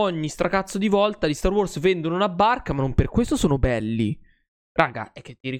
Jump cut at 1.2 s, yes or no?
no